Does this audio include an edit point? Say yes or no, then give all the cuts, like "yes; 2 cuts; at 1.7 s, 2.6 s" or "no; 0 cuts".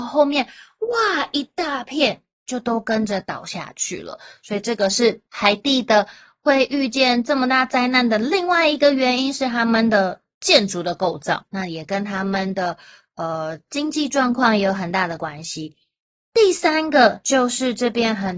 yes; 1 cut; at 5.3 s